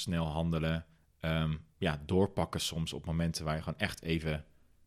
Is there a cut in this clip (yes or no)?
no